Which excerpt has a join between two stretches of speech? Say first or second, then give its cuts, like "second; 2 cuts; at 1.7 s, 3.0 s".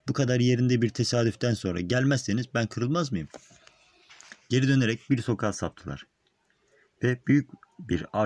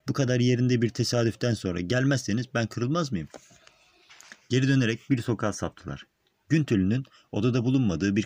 second; 1 cut; at 6.4 s